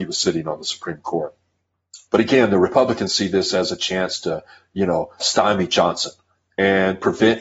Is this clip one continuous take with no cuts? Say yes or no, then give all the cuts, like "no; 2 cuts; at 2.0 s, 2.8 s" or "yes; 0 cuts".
no; 2 cuts; at 2.1 s, 5.2 s